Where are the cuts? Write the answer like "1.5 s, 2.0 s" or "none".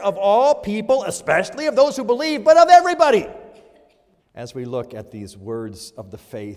4.2 s